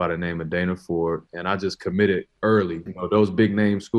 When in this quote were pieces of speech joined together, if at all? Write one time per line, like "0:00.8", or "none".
0:01.3
0:02.9